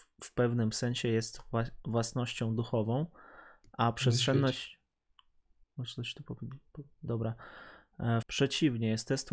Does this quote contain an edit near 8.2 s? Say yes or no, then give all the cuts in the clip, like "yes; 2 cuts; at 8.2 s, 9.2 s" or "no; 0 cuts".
yes; 3 cuts; at 5.6 s, 7.1 s, 8.2 s